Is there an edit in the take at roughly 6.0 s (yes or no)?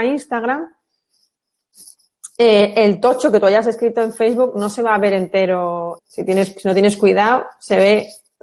yes